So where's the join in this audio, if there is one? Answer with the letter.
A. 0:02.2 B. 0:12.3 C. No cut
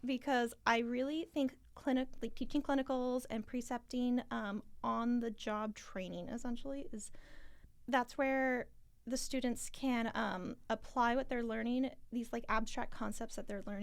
C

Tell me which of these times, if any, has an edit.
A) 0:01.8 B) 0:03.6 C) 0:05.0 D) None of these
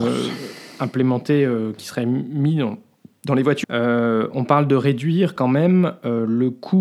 B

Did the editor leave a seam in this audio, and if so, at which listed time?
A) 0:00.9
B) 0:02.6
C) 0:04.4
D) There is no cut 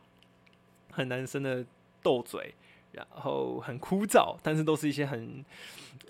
A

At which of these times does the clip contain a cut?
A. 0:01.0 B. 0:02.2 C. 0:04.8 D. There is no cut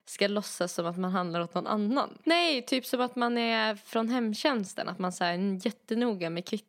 B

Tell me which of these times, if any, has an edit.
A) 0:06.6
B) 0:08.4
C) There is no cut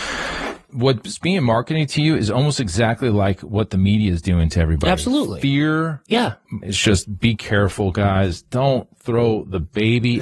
A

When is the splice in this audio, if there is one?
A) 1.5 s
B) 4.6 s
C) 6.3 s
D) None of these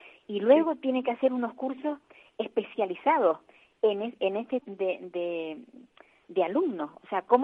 B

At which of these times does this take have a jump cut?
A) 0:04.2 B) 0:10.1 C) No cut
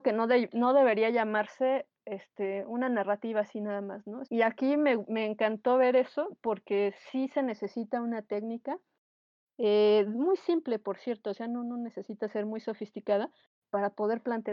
A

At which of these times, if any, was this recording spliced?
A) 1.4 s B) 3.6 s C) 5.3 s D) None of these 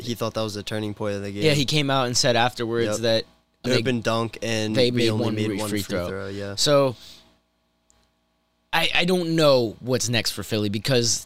B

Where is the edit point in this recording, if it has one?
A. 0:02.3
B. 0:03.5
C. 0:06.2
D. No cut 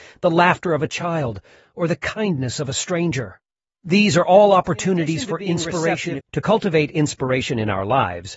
C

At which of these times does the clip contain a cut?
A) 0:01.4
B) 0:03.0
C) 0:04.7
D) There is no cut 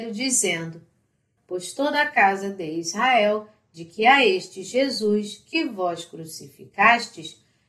A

